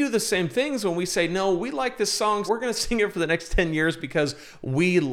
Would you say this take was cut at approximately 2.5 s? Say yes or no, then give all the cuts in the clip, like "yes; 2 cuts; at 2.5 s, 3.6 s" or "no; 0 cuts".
yes; 1 cut; at 2.5 s